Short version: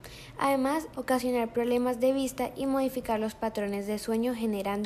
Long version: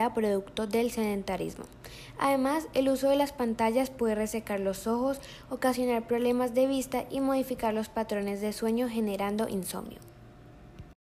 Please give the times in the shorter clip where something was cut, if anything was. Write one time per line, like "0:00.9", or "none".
0:00.9